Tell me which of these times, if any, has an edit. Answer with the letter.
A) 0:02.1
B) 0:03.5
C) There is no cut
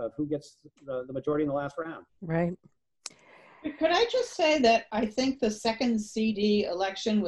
A